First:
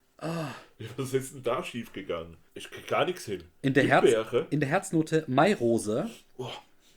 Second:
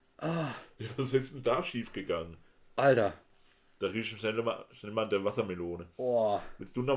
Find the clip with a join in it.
first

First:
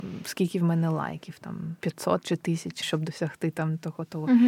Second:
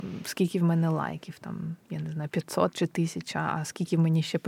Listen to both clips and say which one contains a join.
first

